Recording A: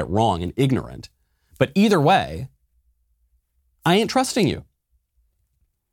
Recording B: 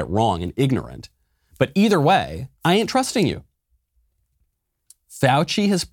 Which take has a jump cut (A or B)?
B